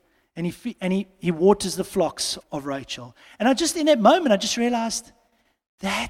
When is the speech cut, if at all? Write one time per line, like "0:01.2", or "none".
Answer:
0:02.4